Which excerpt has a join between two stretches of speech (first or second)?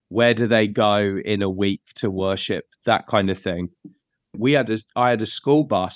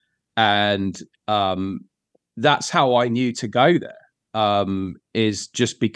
first